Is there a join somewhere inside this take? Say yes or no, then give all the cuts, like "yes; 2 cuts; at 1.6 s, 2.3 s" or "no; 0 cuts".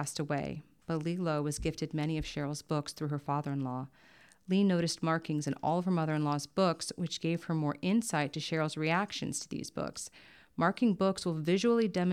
no; 0 cuts